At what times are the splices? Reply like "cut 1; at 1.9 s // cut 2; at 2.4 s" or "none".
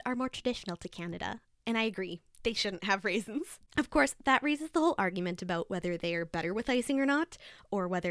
cut 1; at 3.7 s